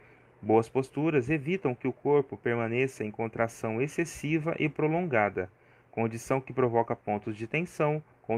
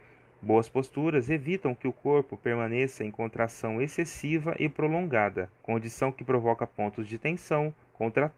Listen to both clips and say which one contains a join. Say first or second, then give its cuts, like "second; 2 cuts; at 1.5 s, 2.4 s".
second; 1 cut; at 5.6 s